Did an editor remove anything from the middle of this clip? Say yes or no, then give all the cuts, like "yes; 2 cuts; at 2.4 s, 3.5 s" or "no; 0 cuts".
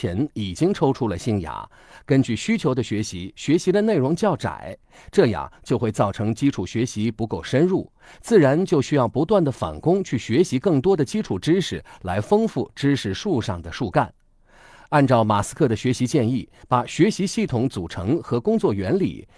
yes; 1 cut; at 16.6 s